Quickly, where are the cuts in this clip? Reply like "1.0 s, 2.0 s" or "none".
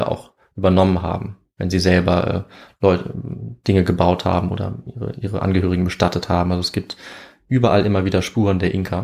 none